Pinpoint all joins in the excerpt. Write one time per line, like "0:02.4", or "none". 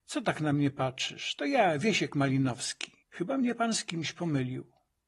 0:03.0

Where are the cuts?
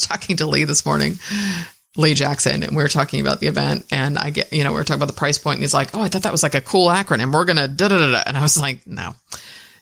none

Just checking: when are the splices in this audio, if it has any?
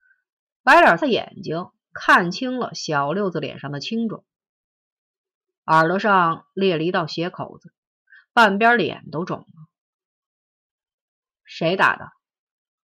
0:01.0

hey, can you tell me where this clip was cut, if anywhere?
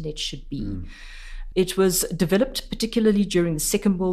0:01.5

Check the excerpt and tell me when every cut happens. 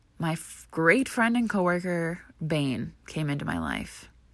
none

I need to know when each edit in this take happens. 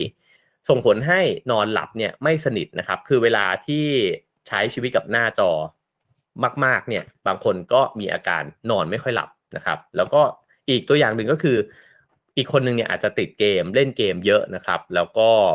none

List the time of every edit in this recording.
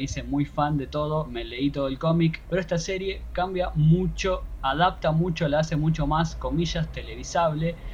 0:02.5

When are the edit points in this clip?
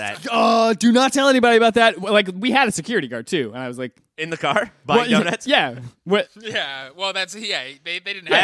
none

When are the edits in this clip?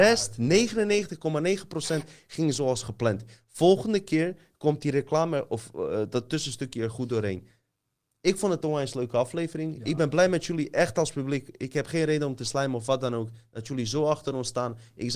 none

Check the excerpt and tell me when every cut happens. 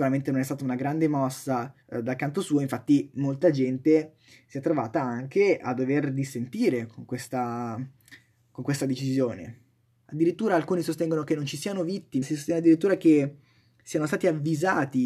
0:01.8
0:10.0
0:12.2

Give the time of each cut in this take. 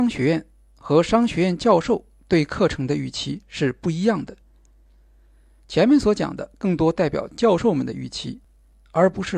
none

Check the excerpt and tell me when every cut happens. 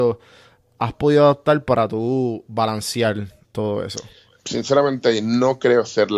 none

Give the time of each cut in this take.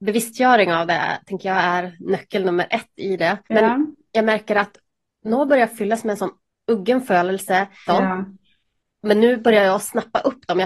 0:03.4
0:07.9

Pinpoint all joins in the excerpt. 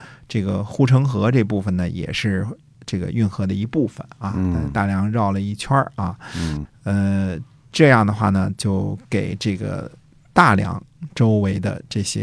0:06.7

